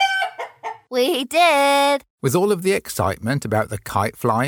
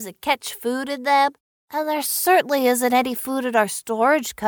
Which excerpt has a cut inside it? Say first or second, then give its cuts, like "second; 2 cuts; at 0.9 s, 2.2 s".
first; 1 cut; at 2.1 s